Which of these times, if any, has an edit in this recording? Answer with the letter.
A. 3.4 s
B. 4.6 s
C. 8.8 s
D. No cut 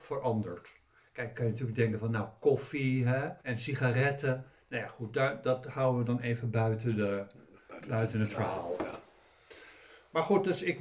A